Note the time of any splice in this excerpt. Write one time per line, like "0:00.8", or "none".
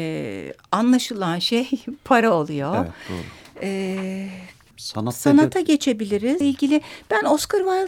0:04.7
0:06.4